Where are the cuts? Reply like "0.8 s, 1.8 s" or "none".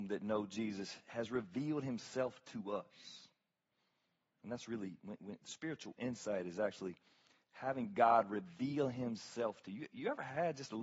none